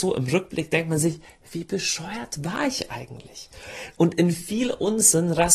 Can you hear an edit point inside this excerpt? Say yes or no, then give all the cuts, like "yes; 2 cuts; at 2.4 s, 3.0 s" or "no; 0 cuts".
no; 0 cuts